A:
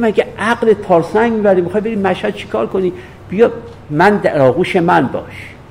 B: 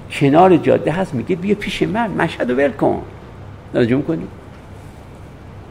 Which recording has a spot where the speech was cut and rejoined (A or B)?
B